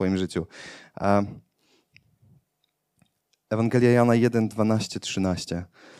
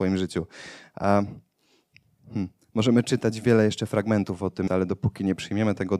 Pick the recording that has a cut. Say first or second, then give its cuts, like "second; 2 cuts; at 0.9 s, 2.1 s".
second; 2 cuts; at 2.2 s, 4.7 s